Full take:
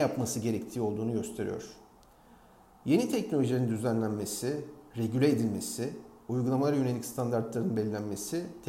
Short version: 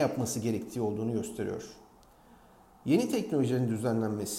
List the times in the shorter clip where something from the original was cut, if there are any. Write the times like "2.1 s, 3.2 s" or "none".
none